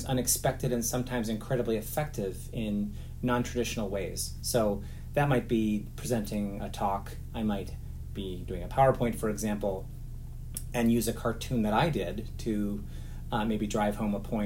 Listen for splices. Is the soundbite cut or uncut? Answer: uncut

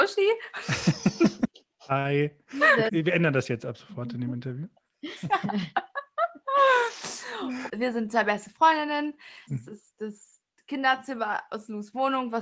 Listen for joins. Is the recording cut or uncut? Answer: cut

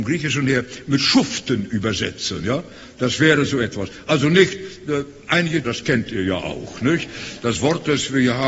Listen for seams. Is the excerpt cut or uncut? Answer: cut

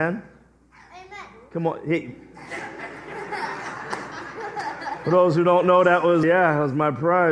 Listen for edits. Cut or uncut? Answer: cut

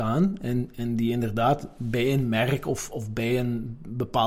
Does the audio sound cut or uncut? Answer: uncut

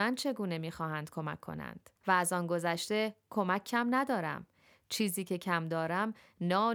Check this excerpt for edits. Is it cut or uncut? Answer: cut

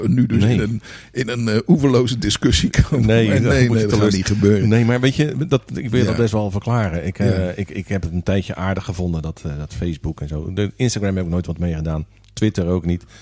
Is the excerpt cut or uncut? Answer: uncut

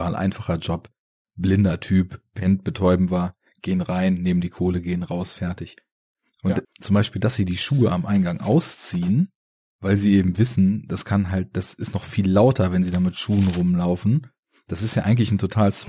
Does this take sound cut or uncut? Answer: cut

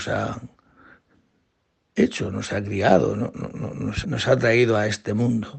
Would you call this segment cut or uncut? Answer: cut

